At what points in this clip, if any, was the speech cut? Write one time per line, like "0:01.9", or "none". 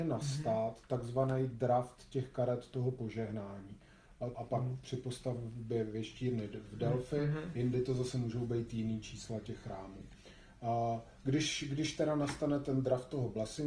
0:04.3